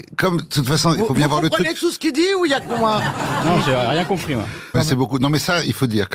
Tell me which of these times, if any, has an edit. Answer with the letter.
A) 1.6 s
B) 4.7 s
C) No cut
B